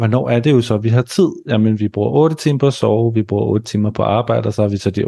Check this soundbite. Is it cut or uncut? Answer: uncut